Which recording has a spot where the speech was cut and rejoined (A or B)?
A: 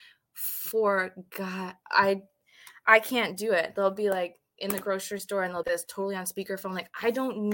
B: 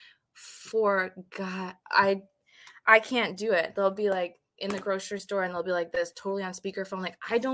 A